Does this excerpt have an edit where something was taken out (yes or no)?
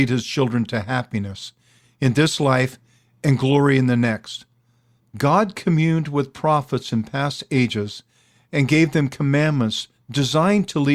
yes